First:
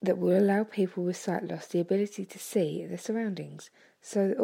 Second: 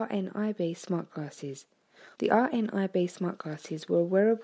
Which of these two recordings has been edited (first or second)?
second